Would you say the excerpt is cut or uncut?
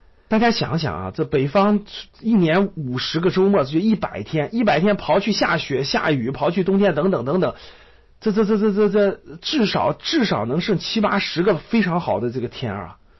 uncut